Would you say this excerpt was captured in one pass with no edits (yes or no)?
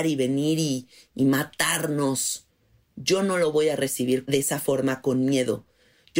yes